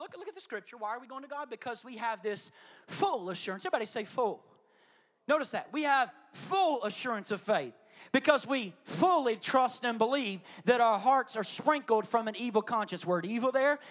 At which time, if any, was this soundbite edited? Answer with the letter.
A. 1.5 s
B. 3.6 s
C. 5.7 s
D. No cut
D